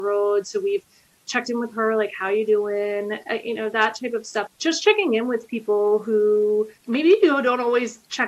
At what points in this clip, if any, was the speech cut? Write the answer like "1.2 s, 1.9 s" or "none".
4.5 s, 6.8 s